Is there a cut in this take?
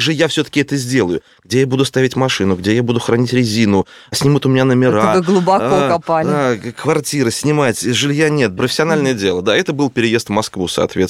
yes; 1 cut; at 8.6 s

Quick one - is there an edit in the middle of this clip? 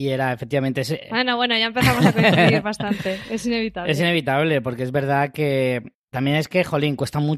no; 0 cuts

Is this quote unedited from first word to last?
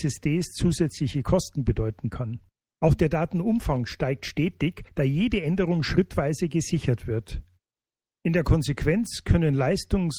yes; 0 cuts

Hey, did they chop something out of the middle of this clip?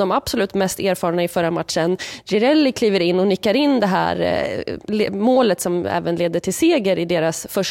no; 0 cuts

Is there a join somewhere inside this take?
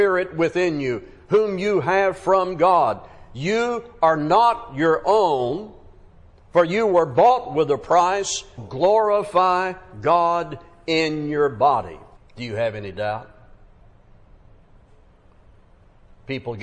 yes; 2 cuts; at 8.6 s, 12.2 s

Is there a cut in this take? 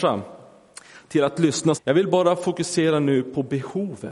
yes; 1 cut; at 1.7 s

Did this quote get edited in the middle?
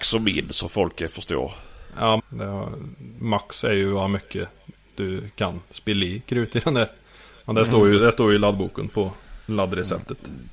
yes; 1 cut; at 2.2 s

